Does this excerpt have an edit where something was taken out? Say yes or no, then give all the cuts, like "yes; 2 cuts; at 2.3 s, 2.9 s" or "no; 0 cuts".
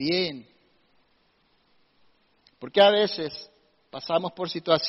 no; 0 cuts